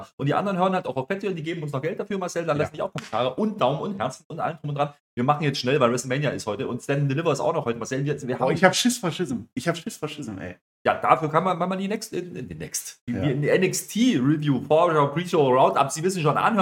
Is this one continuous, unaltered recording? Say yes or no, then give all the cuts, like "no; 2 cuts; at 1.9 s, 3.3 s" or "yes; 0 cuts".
yes; 0 cuts